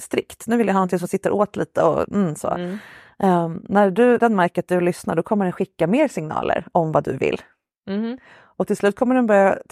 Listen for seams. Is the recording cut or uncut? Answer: cut